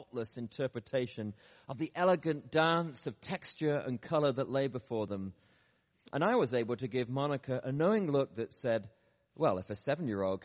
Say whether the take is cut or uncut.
uncut